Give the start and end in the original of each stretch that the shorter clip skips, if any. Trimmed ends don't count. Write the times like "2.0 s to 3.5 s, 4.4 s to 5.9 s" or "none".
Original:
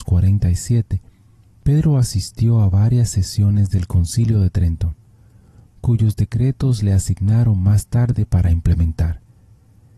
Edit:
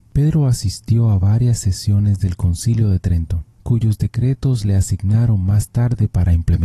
5.0 s to 5.7 s